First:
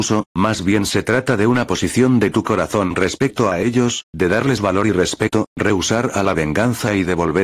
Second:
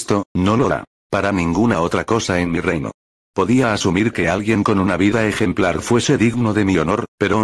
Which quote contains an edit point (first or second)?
second